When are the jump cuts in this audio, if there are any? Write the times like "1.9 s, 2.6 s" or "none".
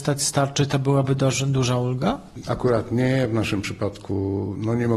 2.4 s